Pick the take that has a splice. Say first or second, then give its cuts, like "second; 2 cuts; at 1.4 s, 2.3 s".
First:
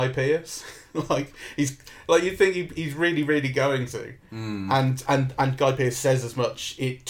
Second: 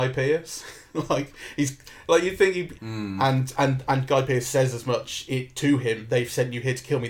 second; 1 cut; at 2.7 s